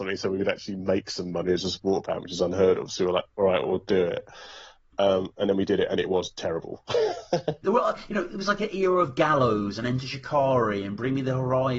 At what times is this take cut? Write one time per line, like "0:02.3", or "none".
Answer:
0:07.6